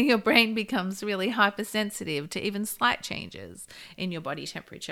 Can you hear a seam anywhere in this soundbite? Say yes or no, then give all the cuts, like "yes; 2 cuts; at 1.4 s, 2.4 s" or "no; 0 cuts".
no; 0 cuts